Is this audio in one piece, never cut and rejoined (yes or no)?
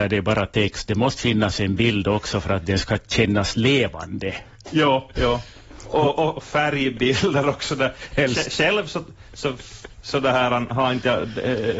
yes